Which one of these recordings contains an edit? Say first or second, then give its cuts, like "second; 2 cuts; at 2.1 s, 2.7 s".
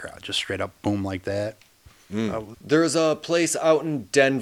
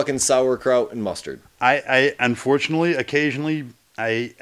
first; 1 cut; at 2.5 s